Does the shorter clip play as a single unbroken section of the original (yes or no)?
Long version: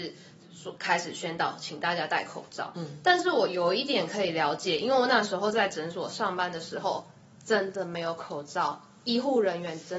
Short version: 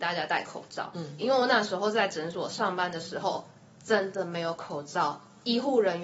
no